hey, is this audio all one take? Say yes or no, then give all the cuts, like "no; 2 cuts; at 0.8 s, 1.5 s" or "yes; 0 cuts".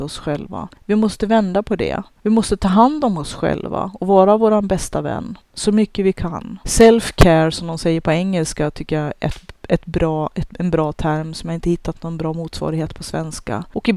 no; 1 cut; at 6.6 s